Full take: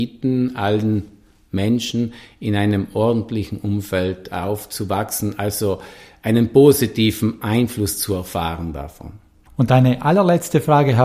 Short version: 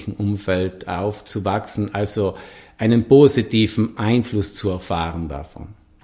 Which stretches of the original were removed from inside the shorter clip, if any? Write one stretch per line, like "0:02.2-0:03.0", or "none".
none